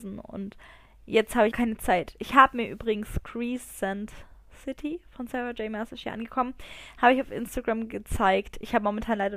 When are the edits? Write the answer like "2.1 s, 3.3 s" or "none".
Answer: 1.5 s